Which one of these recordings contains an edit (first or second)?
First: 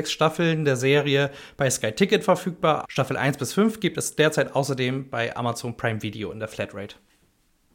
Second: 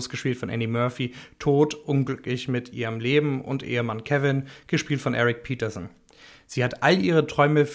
first